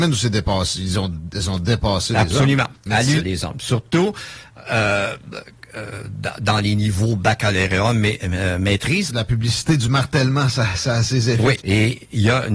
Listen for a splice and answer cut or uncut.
cut